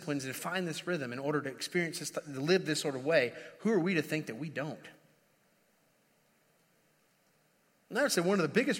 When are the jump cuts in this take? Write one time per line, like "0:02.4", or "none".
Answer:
none